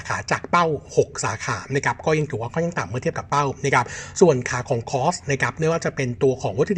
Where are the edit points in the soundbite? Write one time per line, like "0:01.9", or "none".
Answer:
none